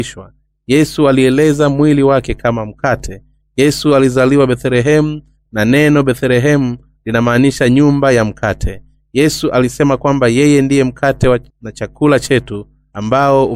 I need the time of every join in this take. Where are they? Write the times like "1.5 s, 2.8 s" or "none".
11.5 s